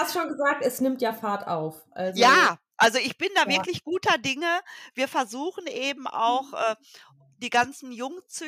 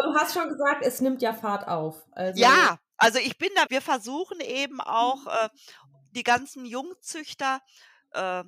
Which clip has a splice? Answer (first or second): second